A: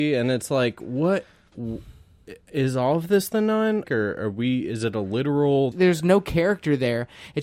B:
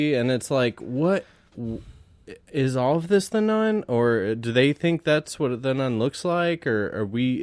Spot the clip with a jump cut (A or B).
A